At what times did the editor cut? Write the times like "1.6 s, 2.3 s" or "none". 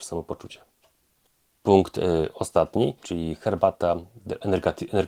3.0 s